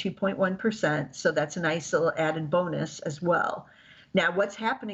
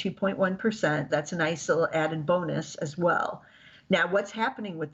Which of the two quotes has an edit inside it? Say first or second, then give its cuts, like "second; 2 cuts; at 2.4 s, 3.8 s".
second; 1 cut; at 1.1 s